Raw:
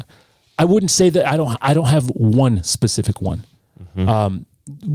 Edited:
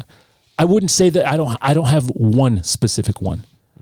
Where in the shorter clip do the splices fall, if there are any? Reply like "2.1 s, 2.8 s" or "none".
none